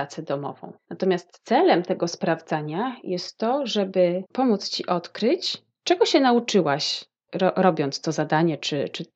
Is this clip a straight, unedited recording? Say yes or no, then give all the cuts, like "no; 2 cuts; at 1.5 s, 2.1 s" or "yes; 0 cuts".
no; 1 cut; at 4.3 s